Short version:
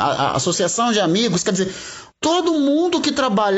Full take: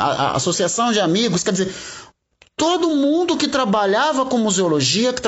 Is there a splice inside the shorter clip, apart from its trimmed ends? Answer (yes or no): yes